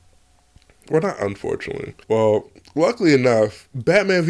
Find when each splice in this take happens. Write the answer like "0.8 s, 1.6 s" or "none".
2.0 s